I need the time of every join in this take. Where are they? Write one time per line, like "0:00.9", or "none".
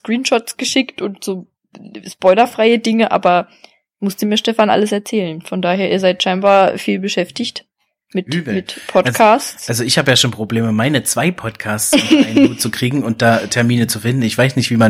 none